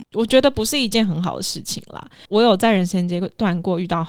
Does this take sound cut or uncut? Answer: uncut